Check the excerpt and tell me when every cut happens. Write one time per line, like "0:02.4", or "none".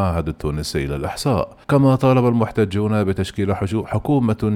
0:01.6